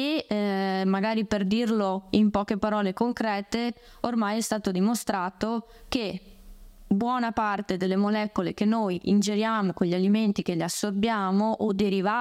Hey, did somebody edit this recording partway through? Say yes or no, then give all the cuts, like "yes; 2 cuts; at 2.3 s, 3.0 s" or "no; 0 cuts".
no; 0 cuts